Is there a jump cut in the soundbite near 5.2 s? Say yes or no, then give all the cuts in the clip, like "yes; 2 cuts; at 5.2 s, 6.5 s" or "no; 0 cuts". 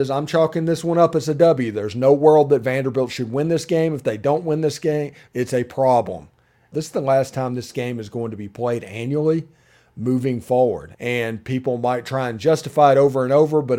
yes; 3 cuts; at 5.2 s, 6.7 s, 10.9 s